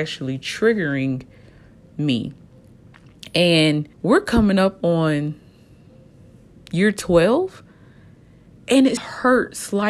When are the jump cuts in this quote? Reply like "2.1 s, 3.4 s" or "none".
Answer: 3.9 s, 9.0 s